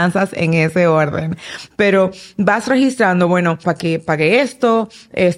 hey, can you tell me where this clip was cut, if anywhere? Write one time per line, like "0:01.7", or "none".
0:03.6